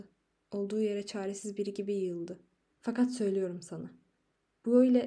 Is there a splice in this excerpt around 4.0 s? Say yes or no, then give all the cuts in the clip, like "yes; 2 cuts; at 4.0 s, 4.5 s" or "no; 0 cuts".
no; 1 cut; at 2.7 s